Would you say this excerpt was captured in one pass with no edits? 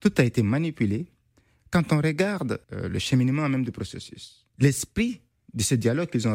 no; 2 cuts; at 2.6 s, 4.5 s

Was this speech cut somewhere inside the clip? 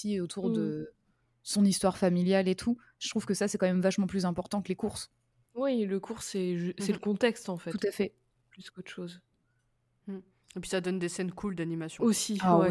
no; 0 cuts

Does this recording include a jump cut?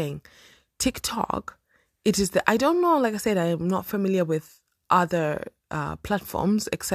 no; 0 cuts

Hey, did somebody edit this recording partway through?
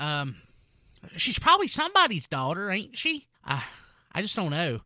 yes; 1 cut; at 3.3 s

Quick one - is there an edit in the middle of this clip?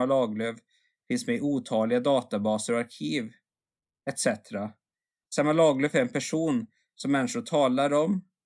yes; 1 cut; at 5.2 s

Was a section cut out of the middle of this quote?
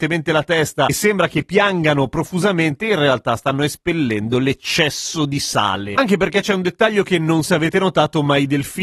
yes; 2 cuts; at 6.0 s, 7.4 s

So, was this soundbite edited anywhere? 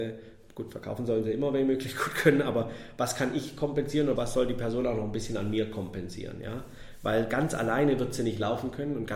yes; 1 cut; at 4.2 s

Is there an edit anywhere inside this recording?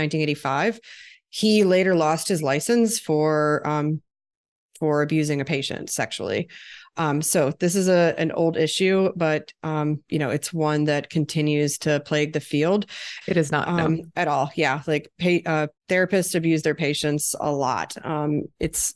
yes; 2 cuts; at 13.2 s, 15.8 s

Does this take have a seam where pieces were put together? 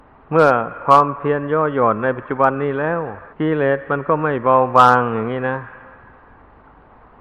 yes; 1 cut; at 3.3 s

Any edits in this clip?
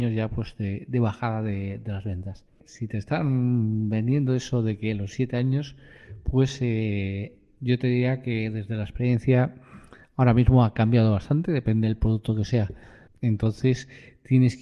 yes; 2 cuts; at 2.6 s, 13.1 s

